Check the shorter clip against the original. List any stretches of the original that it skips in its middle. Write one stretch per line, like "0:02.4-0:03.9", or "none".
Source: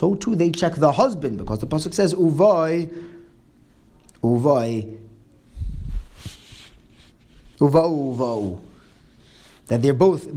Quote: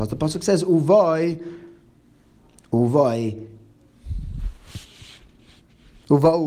none